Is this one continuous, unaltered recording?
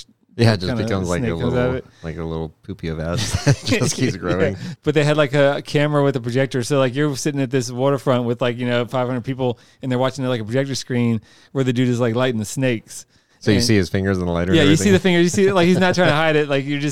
no; 1 cut; at 4.8 s

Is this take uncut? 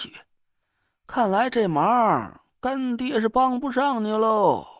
yes; 0 cuts

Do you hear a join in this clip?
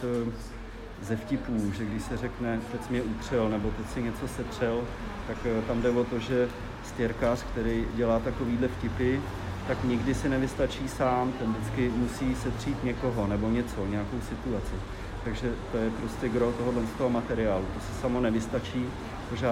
no; 0 cuts

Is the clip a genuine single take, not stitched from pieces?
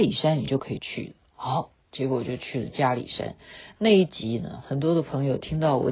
yes; 0 cuts

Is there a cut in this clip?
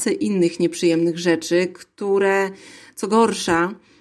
no; 0 cuts

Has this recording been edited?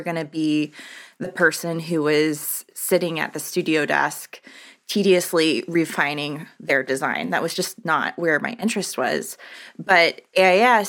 no; 0 cuts

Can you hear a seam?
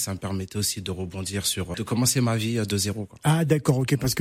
yes; 1 cut; at 1.7 s

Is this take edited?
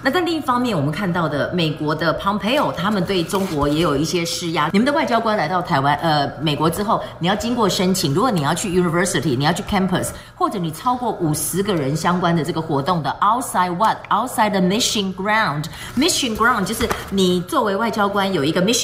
yes; 1 cut; at 4.7 s

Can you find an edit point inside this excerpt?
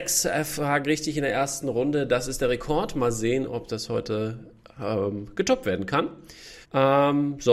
yes; 1 cut; at 6.6 s

